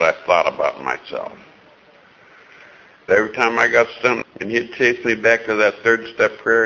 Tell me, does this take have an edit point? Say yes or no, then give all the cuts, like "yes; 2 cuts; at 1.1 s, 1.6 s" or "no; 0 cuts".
yes; 2 cuts; at 3.1 s, 4.2 s